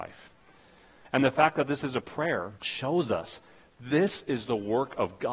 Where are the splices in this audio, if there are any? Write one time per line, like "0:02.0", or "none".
0:01.0
0:02.6

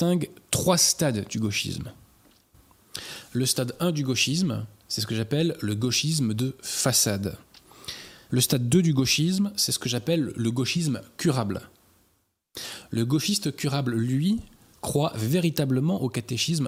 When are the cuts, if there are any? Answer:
0:08.3

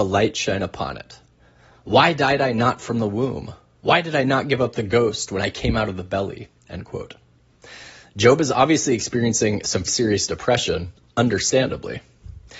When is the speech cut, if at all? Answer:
0:09.9

